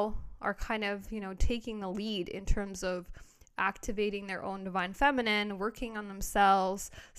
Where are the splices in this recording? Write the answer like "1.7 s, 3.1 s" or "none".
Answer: none